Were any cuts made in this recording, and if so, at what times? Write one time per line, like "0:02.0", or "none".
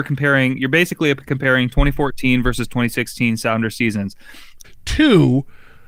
0:04.6